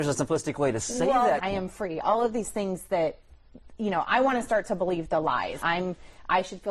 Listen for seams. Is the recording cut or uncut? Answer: cut